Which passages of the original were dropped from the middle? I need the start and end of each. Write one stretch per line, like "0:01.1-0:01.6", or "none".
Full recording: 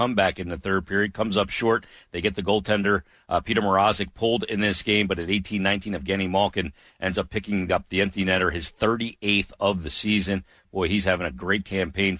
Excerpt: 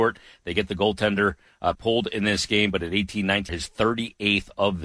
0:03.4-0:04.1
0:05.9-0:08.5